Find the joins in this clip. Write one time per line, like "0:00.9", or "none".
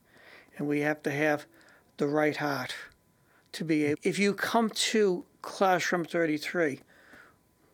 0:03.9